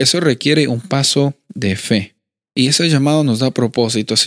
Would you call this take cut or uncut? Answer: cut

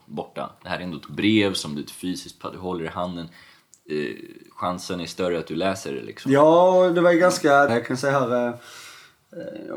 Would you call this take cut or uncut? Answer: cut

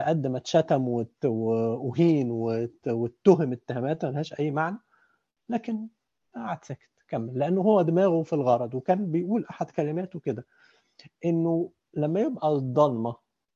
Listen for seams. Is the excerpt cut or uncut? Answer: uncut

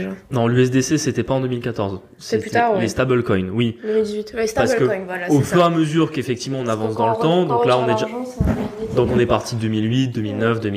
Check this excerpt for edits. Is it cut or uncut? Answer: uncut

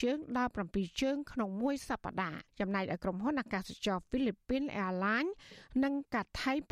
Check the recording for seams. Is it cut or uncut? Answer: cut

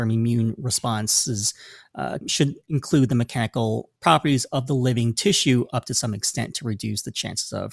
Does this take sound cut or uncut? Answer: cut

